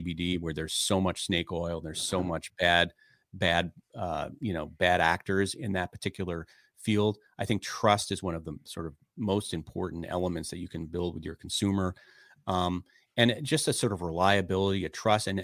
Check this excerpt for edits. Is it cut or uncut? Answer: uncut